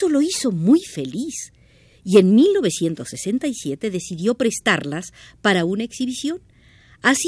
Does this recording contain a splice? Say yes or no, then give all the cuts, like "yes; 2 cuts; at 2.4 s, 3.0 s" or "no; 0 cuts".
no; 0 cuts